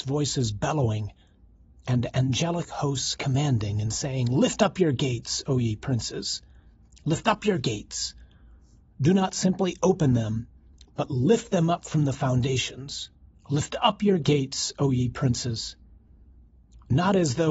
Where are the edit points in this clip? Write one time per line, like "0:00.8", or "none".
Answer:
0:13.4